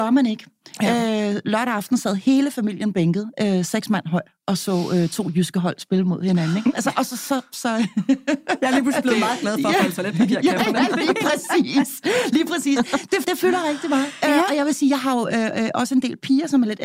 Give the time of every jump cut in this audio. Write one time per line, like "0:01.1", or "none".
0:13.2